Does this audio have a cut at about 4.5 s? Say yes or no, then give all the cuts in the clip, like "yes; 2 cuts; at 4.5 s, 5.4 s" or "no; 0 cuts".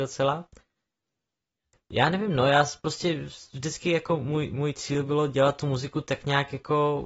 no; 0 cuts